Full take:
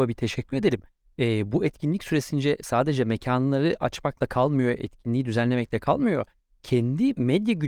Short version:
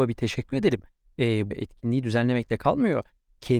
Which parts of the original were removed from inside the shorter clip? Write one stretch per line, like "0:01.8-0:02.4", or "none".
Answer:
0:01.5-0:04.7